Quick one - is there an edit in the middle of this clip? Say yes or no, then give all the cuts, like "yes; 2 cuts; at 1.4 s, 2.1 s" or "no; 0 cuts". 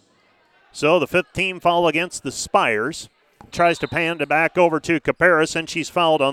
yes; 1 cut; at 3.5 s